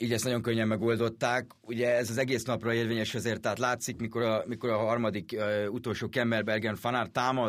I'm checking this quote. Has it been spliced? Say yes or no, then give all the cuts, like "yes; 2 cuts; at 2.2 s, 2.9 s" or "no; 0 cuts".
no; 0 cuts